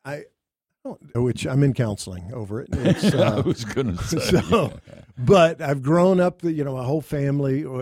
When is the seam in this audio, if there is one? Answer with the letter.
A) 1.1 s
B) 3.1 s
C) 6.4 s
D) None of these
A